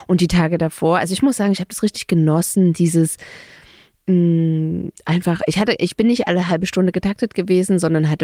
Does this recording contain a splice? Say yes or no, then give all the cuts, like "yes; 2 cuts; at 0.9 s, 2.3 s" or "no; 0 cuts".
no; 0 cuts